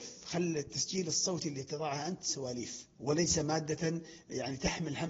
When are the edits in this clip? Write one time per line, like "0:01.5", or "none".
0:02.9